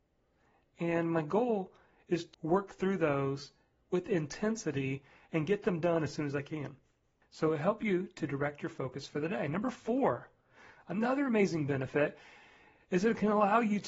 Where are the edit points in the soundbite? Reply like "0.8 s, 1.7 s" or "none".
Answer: 2.3 s, 7.2 s